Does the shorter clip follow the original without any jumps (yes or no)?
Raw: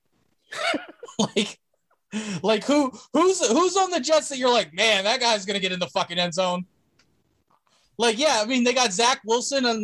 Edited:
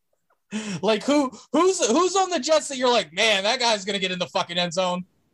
yes